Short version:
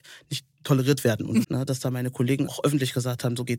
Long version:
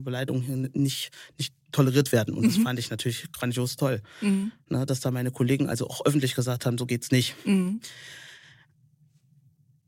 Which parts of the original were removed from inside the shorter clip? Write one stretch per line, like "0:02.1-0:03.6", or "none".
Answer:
0:02.5-0:04.6
0:05.7-0:05.9